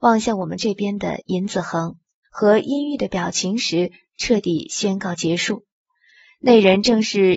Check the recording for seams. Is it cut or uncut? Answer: cut